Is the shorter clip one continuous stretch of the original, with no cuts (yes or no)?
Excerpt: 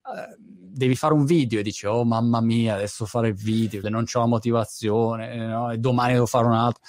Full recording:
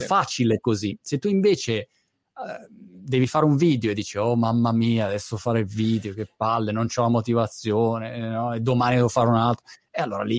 no